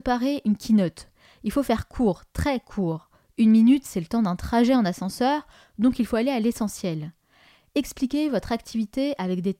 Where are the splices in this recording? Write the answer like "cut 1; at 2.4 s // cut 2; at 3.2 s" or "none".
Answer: none

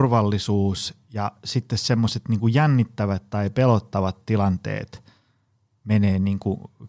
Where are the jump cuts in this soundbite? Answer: none

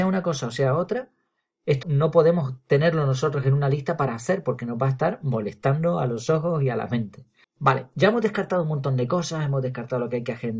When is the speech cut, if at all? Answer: cut 1; at 1.8 s // cut 2; at 7.4 s

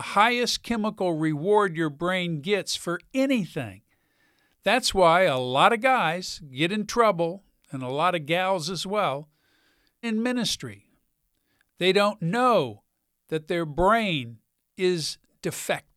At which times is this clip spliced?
cut 1; at 10.0 s

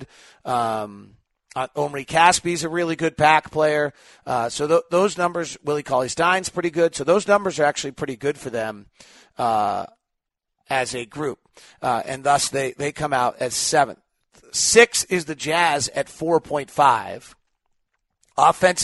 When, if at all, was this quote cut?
none

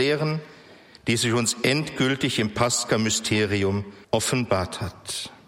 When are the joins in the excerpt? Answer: cut 1; at 1.0 s // cut 2; at 4.0 s

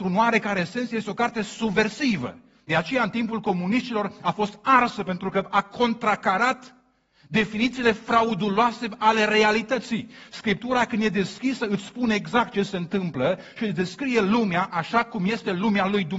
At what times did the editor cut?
none

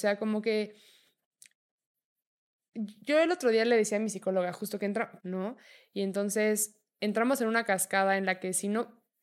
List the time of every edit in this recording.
cut 1; at 5.2 s

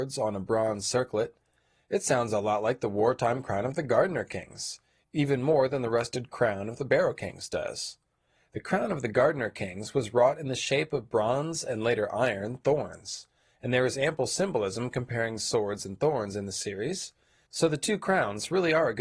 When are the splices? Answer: none

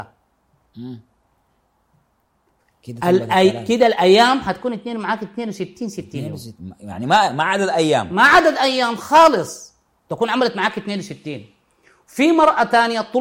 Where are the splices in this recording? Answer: none

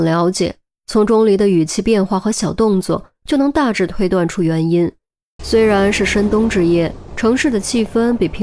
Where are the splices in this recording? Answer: cut 1; at 5.4 s // cut 2; at 7.1 s

